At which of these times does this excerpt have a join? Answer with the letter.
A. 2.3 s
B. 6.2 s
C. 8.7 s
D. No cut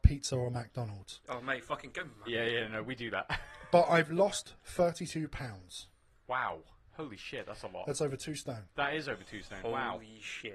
A